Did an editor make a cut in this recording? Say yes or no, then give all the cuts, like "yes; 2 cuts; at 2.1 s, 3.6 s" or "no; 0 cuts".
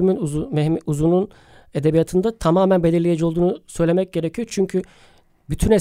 no; 0 cuts